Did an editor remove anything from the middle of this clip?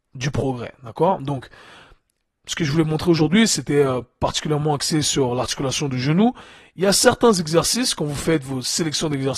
no; 0 cuts

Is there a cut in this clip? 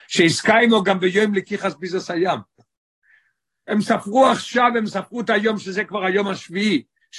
no; 0 cuts

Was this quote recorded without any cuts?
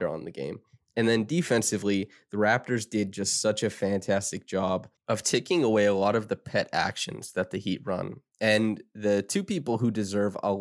no; 1 cut; at 5.0 s

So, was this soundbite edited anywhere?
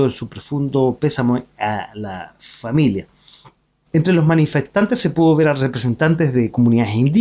yes; 1 cut; at 3.9 s

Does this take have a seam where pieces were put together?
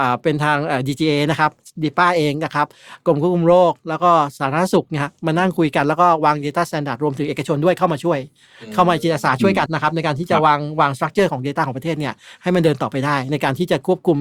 yes; 1 cut; at 9.7 s

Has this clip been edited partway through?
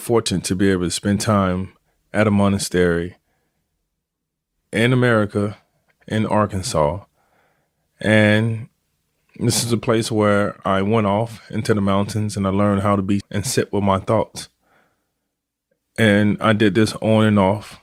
yes; 2 cuts; at 6.0 s, 13.2 s

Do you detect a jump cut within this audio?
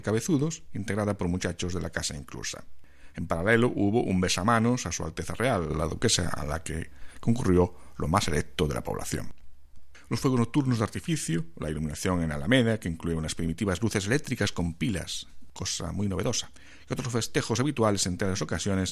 no; 0 cuts

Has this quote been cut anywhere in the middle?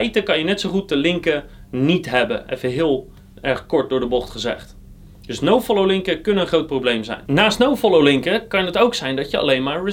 no; 0 cuts

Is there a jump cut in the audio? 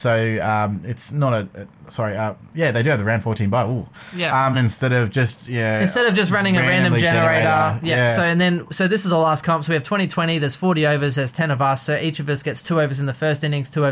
yes; 1 cut; at 4.5 s

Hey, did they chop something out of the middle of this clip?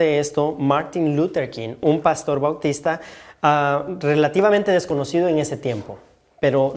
no; 0 cuts

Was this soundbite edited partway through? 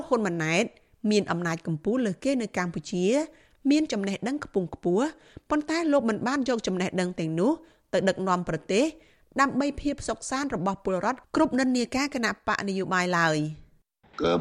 no; 0 cuts

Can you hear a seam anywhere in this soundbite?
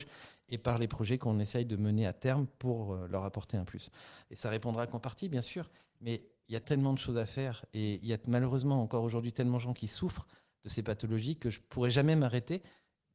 yes; 2 cuts; at 4.2 s, 6.6 s

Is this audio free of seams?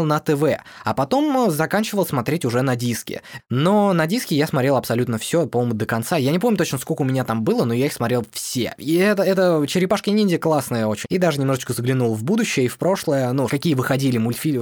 no; 3 cuts; at 3.4 s, 11.0 s, 13.5 s

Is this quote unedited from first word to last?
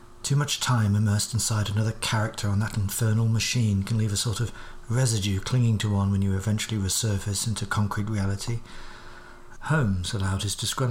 no; 1 cut; at 9.5 s

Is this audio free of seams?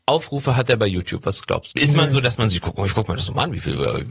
no; 1 cut; at 1.7 s

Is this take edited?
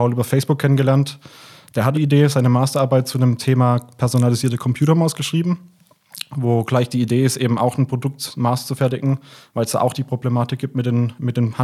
yes; 1 cut; at 1.9 s

